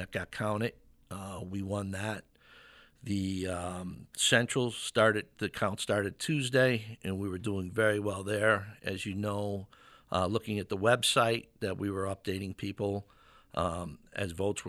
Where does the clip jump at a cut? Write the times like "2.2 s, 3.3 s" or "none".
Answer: none